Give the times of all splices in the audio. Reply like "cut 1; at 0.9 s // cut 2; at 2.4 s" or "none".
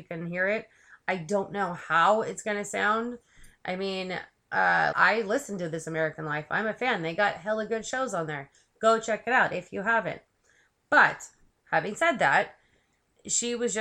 cut 1; at 4.9 s